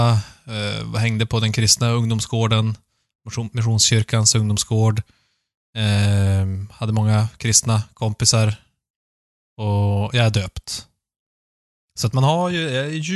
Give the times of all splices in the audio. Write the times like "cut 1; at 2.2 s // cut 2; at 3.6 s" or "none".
cut 1; at 11.7 s